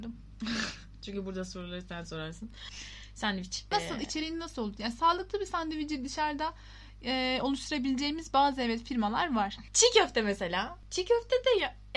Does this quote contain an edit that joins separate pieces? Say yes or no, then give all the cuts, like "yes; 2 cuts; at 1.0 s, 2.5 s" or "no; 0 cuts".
yes; 2 cuts; at 2.7 s, 9.7 s